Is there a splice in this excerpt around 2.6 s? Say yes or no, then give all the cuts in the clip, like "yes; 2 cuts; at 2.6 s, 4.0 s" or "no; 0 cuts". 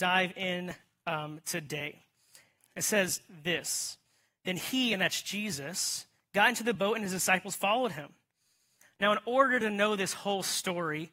yes; 1 cut; at 2.6 s